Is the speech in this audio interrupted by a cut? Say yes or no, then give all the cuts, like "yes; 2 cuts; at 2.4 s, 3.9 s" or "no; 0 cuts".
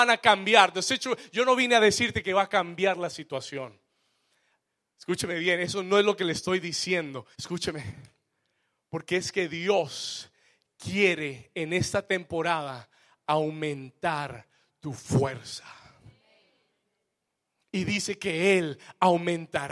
yes; 1 cut; at 7.3 s